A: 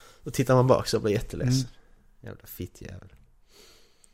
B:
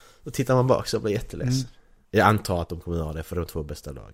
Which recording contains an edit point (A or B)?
B